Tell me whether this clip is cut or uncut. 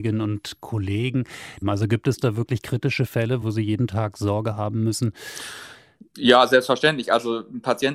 cut